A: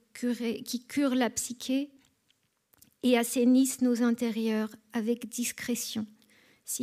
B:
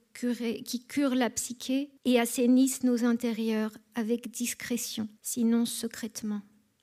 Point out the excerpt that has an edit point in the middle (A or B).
B